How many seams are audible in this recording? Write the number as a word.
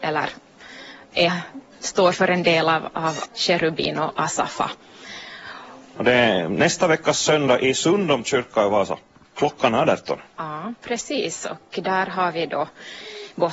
two